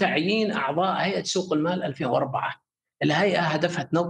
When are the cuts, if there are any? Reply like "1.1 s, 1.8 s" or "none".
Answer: none